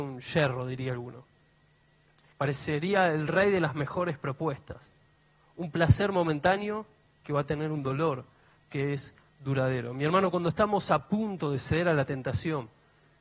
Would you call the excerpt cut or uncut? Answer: cut